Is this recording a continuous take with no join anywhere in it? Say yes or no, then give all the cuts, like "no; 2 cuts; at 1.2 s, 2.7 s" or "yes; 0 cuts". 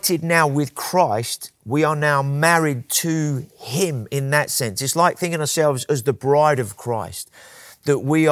yes; 0 cuts